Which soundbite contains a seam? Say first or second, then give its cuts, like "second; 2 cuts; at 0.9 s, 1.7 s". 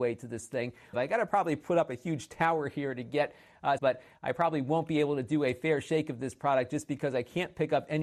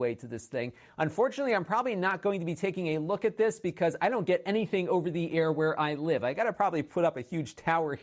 first; 2 cuts; at 0.9 s, 3.8 s